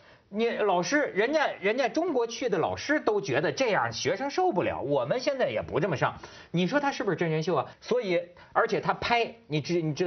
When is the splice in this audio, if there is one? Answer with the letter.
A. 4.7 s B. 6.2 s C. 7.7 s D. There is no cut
C